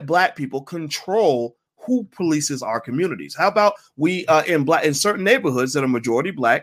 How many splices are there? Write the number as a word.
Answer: zero